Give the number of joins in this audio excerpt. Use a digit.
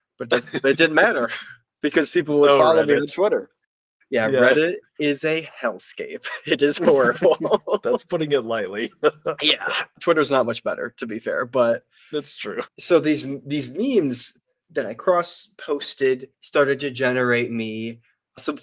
2